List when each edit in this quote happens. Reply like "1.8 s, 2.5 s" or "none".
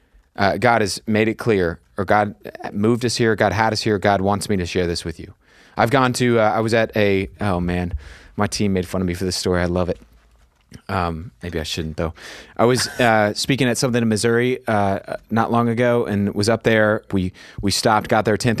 17.1 s